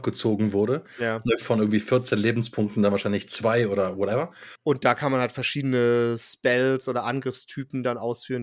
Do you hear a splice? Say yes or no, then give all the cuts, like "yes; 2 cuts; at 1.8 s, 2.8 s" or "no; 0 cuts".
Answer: yes; 1 cut; at 4.5 s